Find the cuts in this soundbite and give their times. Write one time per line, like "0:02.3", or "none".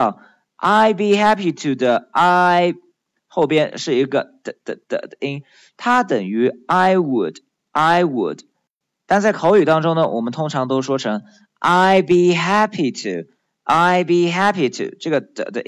none